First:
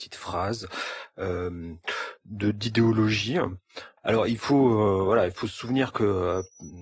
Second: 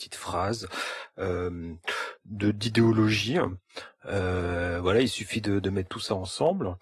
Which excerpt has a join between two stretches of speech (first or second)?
first